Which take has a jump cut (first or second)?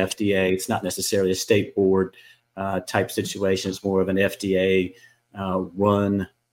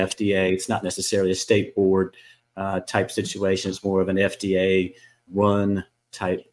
second